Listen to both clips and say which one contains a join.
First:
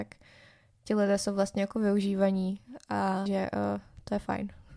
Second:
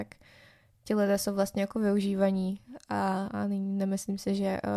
first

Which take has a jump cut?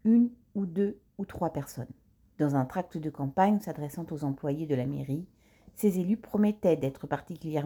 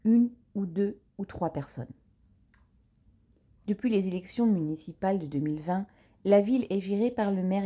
first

